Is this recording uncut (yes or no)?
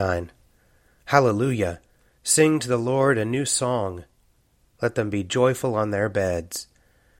no